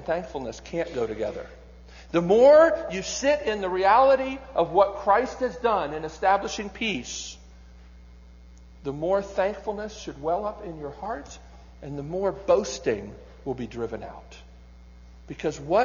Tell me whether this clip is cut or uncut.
uncut